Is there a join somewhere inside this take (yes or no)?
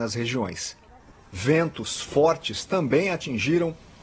no